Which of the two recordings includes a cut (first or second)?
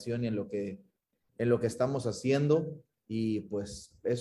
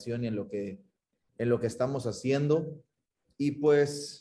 first